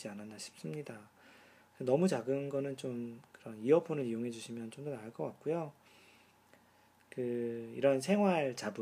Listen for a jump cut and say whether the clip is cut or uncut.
uncut